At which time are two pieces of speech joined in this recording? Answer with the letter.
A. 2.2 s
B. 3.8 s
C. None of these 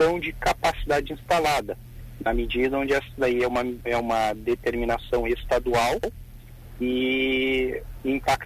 B